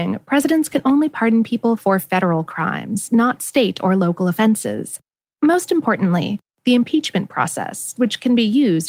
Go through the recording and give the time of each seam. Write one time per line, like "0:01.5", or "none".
0:05.3